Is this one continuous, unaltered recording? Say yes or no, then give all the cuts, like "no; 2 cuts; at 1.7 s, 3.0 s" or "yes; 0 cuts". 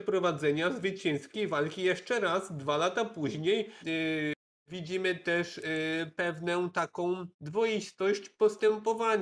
no; 2 cuts; at 3.8 s, 7.3 s